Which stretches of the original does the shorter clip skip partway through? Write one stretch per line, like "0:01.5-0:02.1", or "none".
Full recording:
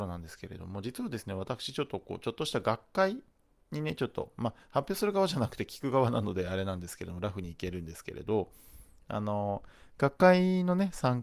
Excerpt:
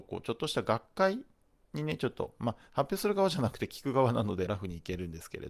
0:06.4-0:07.2